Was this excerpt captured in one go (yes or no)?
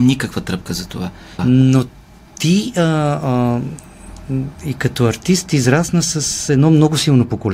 no